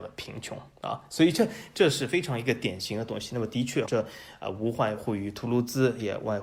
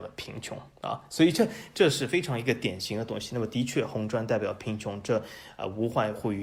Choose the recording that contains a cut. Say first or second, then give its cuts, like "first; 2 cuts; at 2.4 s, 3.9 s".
first; 1 cut; at 3.9 s